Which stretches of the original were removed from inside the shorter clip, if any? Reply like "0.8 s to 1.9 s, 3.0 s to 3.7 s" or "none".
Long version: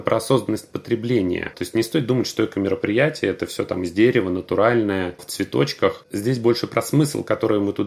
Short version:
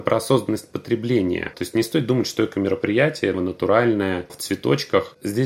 3.3 s to 4.2 s